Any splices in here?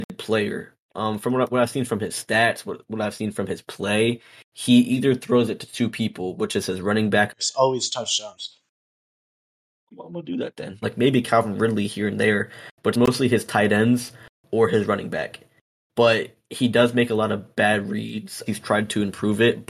yes; 3 cuts; at 7.3 s, 10.8 s, 18.5 s

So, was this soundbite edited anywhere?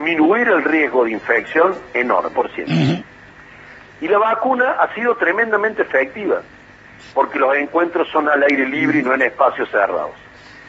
yes; 2 cuts; at 2.3 s, 7.1 s

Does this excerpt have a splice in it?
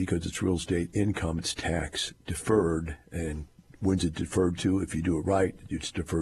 no; 0 cuts

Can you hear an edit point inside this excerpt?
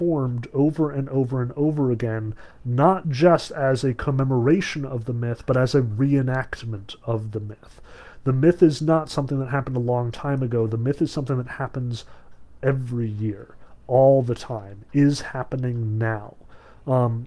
no; 0 cuts

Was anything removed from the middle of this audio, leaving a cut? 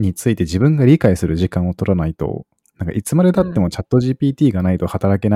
no; 0 cuts

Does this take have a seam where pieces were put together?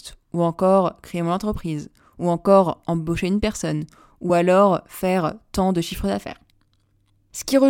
no; 0 cuts

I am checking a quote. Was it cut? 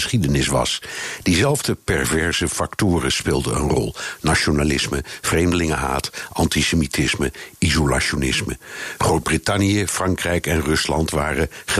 no; 0 cuts

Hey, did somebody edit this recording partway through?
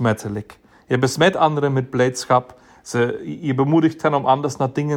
no; 0 cuts

